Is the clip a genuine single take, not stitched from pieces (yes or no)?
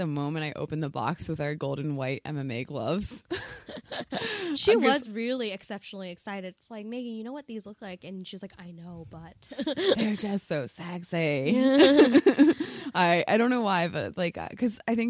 yes